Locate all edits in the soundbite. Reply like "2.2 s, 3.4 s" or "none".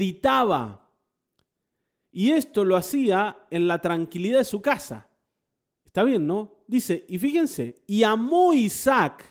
none